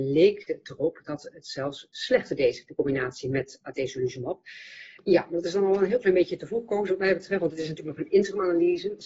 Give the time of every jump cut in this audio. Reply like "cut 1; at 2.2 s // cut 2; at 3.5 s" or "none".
cut 1; at 5.0 s